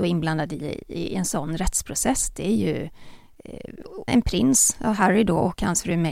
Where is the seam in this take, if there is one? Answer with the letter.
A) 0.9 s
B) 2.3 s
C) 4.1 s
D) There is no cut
C